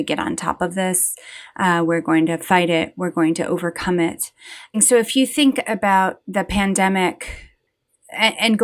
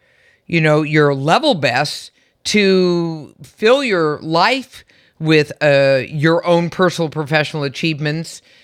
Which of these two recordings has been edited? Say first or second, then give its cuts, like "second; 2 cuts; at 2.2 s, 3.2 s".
first; 1 cut; at 4.7 s